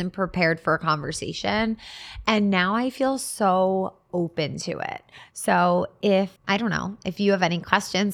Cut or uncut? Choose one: cut